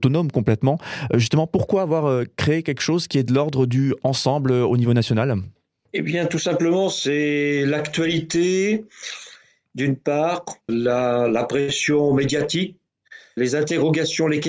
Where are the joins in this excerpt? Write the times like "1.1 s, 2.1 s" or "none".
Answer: 10.7 s, 13.4 s